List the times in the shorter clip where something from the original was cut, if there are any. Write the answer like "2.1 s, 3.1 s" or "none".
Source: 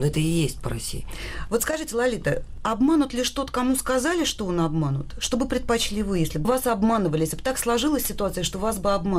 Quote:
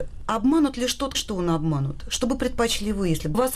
1.1 s